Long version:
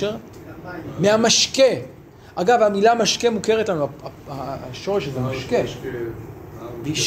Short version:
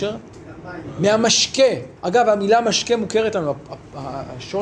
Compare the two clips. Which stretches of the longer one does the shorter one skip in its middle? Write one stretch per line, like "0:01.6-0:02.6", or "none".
0:02.0-0:02.3